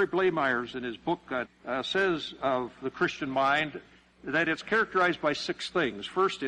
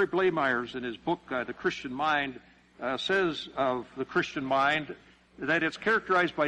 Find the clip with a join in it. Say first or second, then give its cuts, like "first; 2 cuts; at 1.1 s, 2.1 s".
first; 1 cut; at 1.4 s